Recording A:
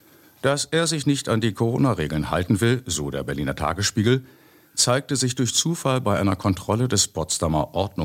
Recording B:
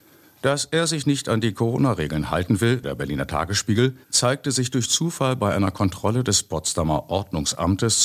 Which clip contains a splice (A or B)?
B